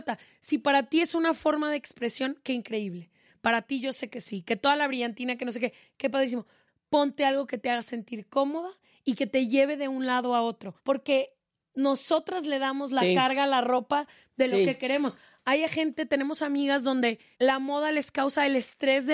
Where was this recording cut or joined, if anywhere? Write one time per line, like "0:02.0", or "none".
0:06.7